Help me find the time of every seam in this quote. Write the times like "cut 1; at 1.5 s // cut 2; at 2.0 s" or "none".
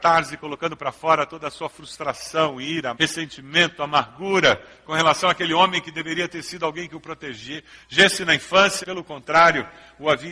cut 1; at 2.9 s // cut 2; at 8.8 s